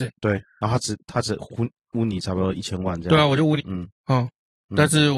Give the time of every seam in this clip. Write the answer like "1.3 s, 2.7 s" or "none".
3.6 s